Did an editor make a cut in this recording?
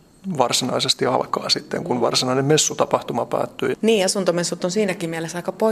yes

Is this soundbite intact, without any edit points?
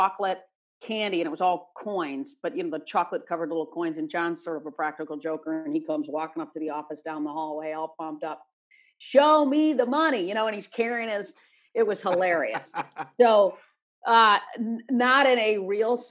yes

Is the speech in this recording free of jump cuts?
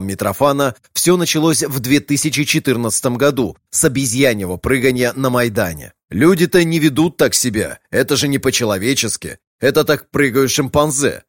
yes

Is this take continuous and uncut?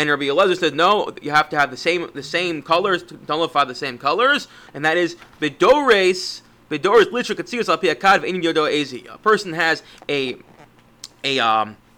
no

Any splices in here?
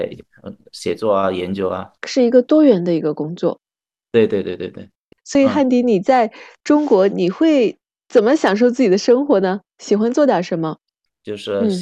yes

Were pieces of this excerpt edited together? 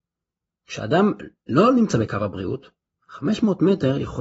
no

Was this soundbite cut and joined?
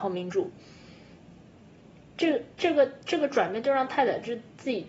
no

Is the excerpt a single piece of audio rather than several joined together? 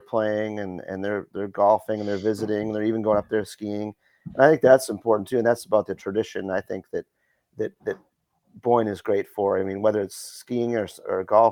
yes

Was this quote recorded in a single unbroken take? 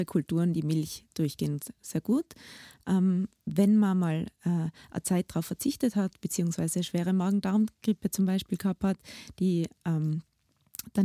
yes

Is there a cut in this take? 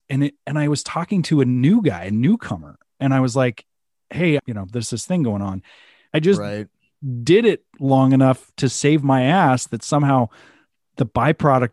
yes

